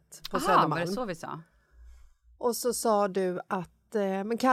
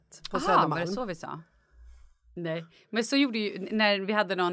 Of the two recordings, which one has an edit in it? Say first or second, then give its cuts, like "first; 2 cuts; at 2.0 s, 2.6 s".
second; 1 cut; at 2.4 s